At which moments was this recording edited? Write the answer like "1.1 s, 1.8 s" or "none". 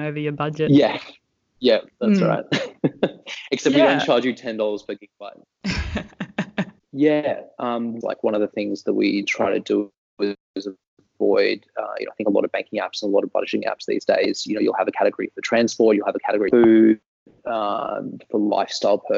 6.8 s, 8.0 s